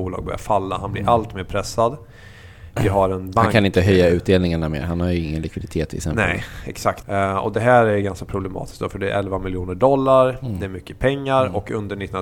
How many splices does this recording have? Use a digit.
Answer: 1